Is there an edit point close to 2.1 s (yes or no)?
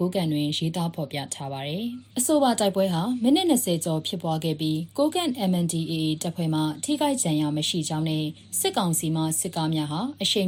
yes